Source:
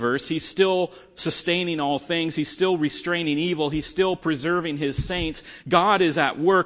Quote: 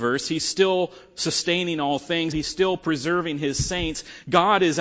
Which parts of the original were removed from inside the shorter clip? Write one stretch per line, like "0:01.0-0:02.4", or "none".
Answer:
0:02.3-0:03.7